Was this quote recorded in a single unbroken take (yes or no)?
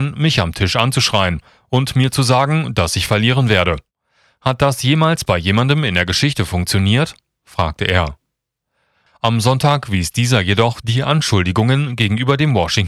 no